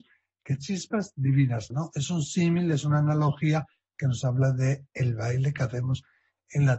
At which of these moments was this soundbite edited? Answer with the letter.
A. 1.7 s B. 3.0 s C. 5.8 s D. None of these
A